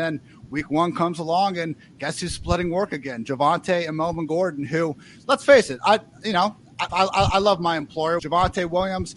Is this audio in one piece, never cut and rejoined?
no; 2 cuts; at 6.9 s, 8.2 s

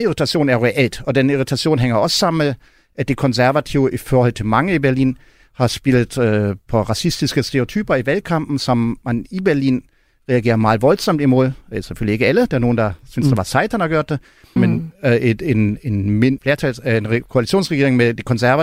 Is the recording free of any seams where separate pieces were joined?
no; 2 cuts; at 14.6 s, 16.4 s

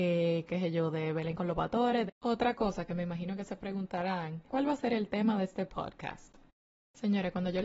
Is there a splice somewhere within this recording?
yes; 2 cuts; at 2.1 s, 4.5 s

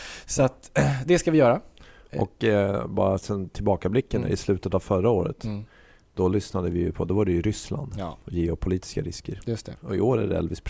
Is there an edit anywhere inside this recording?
yes; 1 cut; at 9.8 s

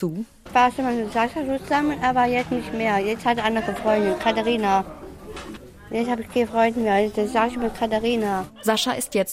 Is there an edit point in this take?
no; 0 cuts

